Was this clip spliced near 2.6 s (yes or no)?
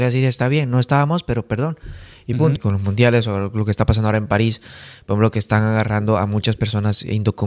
yes